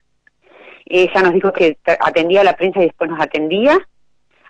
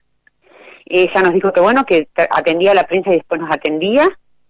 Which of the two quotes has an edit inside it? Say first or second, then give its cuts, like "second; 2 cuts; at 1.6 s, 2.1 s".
first; 1 cut; at 1.5 s